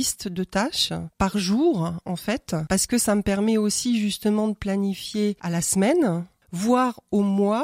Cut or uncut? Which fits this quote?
uncut